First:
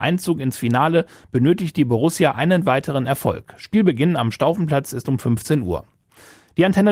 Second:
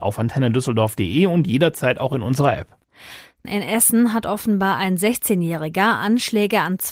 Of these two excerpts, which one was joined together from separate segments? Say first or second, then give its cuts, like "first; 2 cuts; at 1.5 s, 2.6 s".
second; 1 cut; at 3.4 s